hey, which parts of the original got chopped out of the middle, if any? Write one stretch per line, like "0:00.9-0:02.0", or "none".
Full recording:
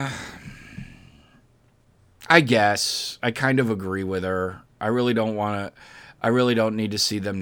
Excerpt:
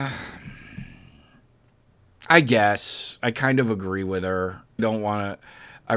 0:04.8-0:05.1

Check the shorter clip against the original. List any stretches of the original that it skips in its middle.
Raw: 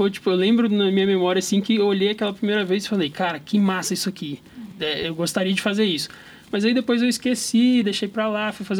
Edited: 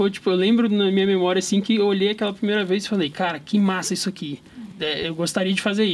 none

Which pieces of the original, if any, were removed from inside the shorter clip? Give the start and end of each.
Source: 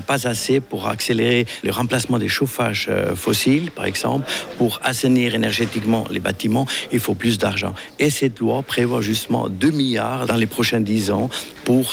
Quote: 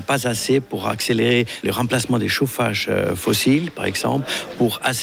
none

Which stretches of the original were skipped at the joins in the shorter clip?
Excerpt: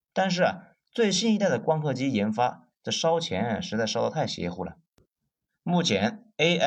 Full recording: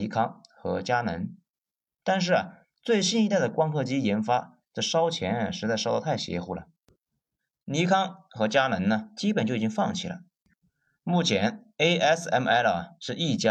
0:07.4-0:10.9

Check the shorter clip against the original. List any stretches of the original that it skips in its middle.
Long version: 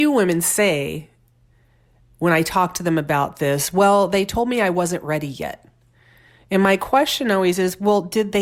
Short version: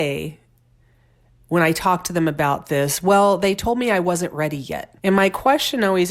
0:05.7-0:06.5

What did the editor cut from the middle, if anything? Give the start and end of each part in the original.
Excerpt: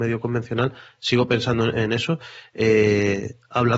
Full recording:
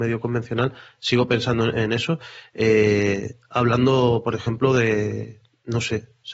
none

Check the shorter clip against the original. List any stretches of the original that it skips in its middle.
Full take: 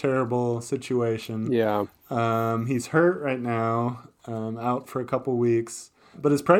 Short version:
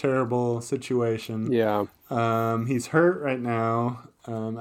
none

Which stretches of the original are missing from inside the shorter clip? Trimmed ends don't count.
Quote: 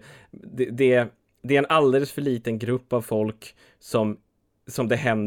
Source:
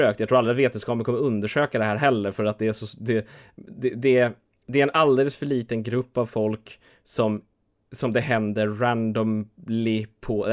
none

